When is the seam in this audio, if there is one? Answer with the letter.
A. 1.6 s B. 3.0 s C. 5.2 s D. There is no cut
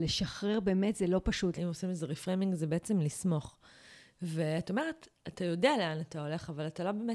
A